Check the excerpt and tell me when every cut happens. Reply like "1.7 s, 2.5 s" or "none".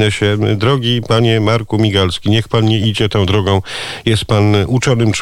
none